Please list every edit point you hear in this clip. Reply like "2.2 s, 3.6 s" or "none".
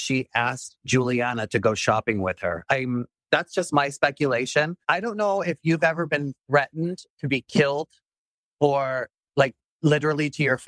4.8 s, 7.1 s